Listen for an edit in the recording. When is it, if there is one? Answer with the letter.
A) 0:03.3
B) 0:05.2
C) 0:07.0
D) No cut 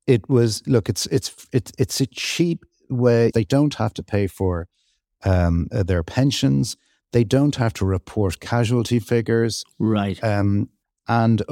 A